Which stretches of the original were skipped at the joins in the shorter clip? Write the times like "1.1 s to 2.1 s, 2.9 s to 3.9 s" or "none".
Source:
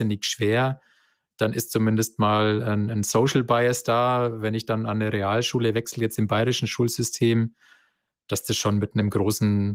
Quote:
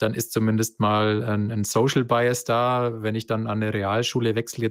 none